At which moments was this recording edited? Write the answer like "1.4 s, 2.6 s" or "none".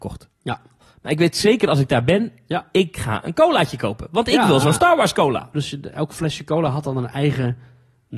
5.5 s